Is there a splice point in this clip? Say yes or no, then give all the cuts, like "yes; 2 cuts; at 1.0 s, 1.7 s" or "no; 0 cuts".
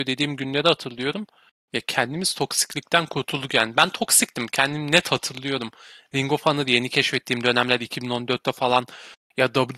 yes; 1 cut; at 1.6 s